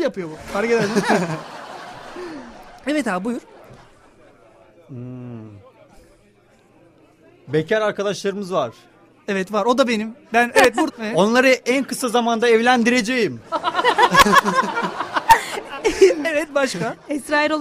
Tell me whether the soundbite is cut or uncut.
cut